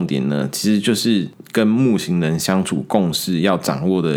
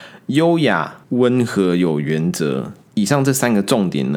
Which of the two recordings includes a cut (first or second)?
second